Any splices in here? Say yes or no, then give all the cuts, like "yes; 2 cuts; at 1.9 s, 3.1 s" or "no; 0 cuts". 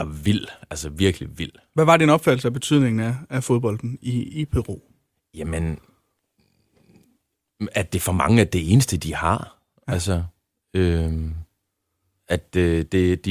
no; 0 cuts